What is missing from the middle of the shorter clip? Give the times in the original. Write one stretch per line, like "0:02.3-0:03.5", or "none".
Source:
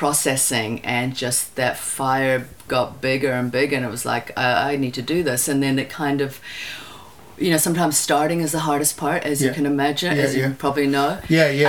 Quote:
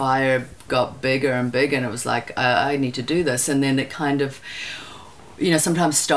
none